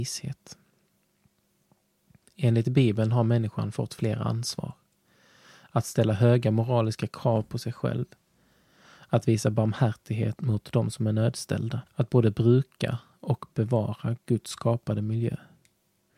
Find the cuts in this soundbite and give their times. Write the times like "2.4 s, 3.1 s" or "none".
10.4 s, 11.9 s